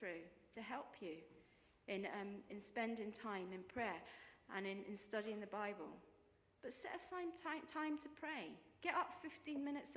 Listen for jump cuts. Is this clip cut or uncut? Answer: cut